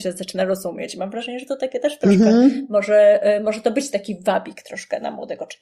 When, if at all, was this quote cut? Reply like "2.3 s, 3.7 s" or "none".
none